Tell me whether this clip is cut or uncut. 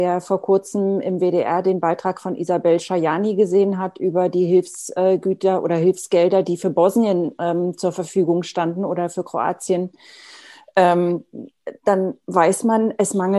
uncut